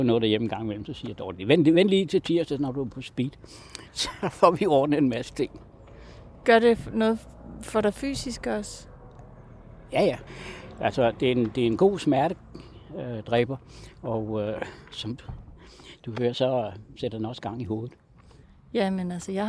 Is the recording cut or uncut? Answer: uncut